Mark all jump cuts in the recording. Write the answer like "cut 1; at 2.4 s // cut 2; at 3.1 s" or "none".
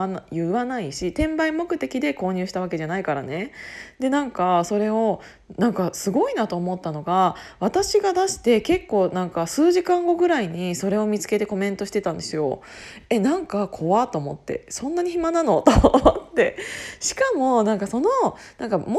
none